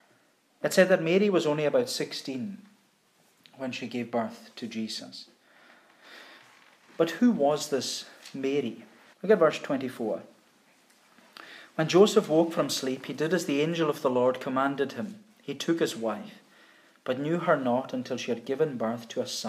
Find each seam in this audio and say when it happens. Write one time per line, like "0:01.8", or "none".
0:09.1